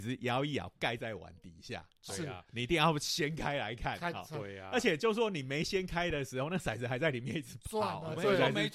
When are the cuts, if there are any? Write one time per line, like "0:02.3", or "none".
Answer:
none